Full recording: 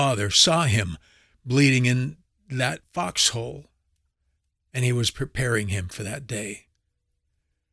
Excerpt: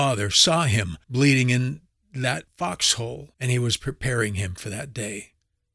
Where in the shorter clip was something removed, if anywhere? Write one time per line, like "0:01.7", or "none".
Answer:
0:01.0
0:03.3